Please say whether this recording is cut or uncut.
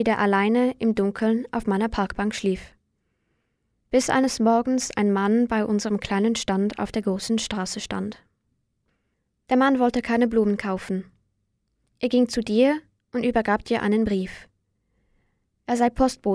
uncut